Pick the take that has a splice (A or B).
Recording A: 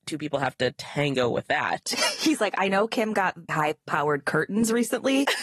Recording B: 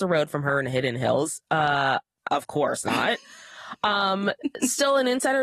A